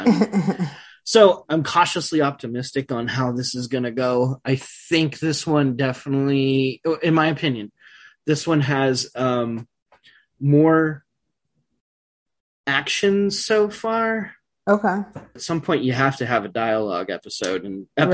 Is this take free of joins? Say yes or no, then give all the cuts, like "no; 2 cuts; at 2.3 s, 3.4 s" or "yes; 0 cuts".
no; 2 cuts; at 1.5 s, 15.4 s